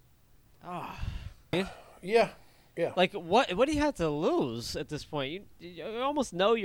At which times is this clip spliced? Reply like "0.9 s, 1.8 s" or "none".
1.5 s